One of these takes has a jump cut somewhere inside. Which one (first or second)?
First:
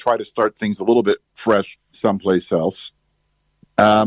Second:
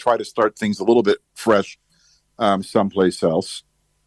first